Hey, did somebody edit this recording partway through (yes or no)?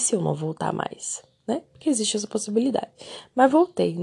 no